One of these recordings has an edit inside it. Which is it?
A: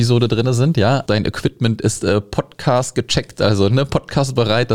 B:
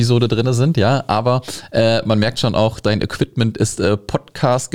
A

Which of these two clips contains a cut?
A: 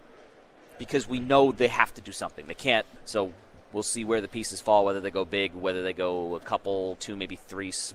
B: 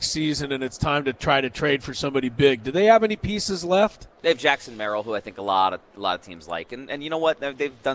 A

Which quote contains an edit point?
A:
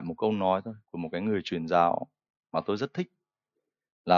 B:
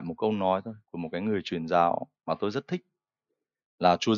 B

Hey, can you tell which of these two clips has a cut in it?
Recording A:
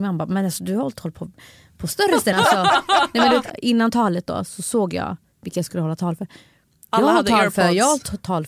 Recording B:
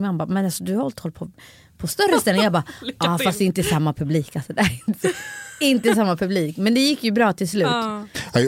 A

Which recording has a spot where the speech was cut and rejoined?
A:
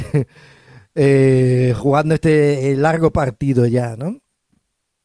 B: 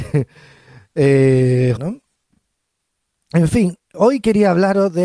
B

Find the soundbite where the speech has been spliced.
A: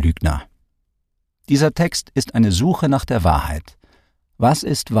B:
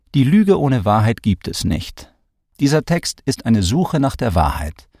B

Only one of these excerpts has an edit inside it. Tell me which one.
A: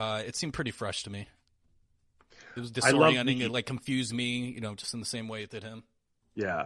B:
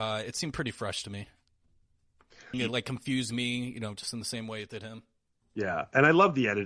B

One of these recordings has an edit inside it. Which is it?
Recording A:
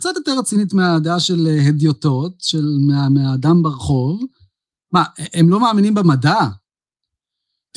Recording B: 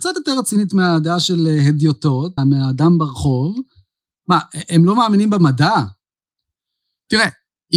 B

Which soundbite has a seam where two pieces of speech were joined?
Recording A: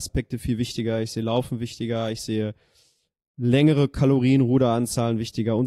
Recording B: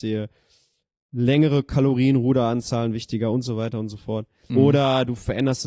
B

